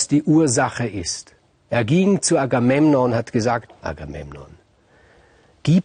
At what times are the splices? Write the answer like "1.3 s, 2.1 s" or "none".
3.7 s